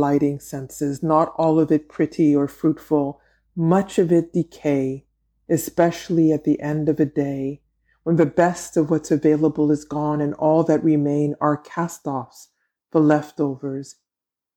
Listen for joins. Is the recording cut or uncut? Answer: uncut